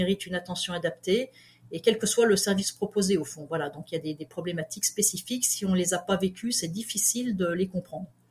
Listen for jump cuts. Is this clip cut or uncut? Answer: uncut